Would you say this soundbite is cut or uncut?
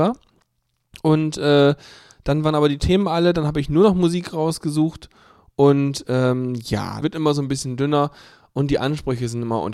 cut